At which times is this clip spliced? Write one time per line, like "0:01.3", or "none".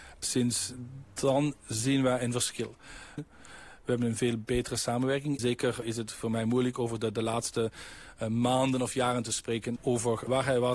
0:03.2
0:05.4
0:09.8